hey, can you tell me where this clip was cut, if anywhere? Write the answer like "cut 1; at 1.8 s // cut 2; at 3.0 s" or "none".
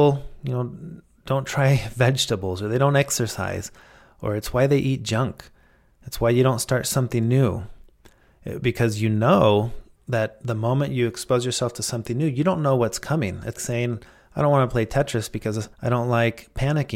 cut 1; at 13.6 s // cut 2; at 15.7 s